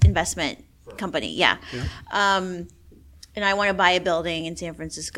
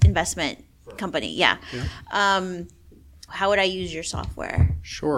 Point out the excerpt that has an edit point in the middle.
second; 1 cut; at 3.3 s

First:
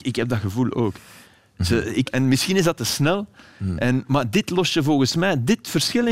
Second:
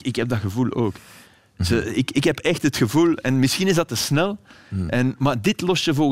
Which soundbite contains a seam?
first; 1 cut; at 2.1 s

